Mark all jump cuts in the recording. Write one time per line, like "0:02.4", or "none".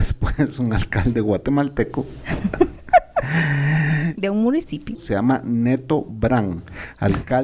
0:04.9

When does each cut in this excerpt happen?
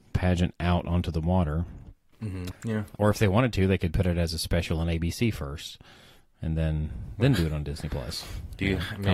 0:02.5

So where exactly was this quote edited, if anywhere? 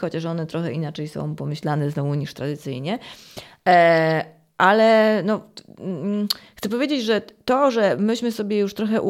none

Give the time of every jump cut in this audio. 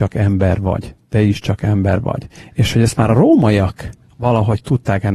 none

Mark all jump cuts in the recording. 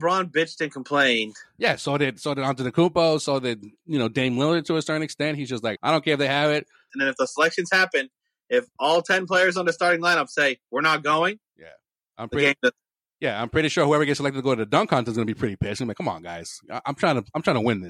0:06.9

